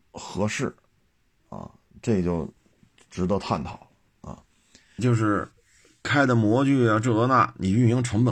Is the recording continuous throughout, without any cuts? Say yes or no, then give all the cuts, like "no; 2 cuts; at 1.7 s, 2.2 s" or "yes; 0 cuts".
no; 1 cut; at 5.0 s